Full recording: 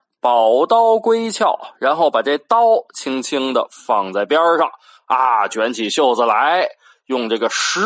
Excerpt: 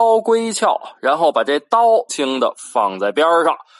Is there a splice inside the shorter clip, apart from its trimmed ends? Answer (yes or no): yes